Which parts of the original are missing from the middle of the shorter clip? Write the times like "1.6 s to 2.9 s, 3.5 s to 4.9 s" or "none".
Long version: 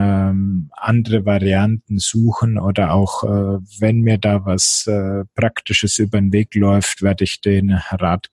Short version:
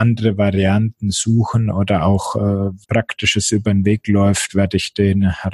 3.7 s to 5.3 s

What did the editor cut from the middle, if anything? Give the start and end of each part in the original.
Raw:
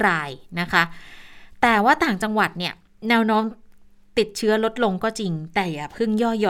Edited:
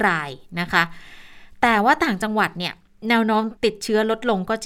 3.6 s to 4.1 s

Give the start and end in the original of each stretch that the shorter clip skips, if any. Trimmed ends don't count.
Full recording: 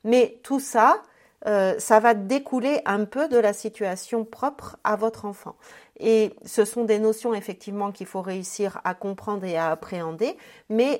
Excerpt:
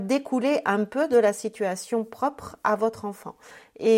none

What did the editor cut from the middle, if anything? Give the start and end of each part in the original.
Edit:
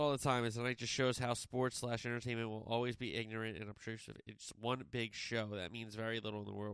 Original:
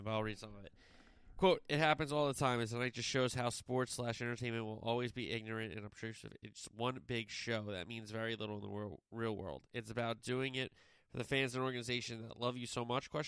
none

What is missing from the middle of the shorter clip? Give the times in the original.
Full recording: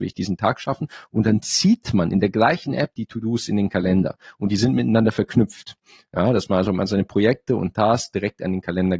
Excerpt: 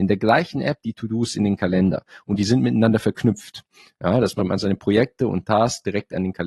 6.5 s to 6.7 s

